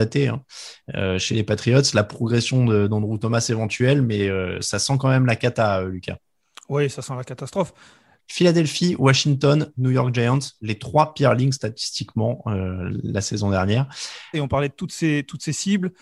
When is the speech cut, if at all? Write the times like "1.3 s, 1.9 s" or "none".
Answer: 8.2 s, 14.3 s